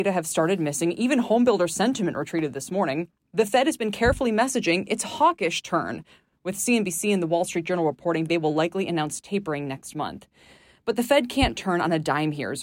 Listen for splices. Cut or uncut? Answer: uncut